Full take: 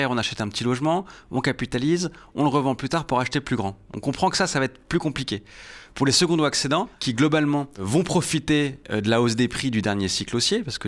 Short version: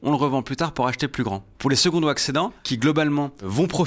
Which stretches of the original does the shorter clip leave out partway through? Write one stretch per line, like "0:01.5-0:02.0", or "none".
0:03.9-0:05.9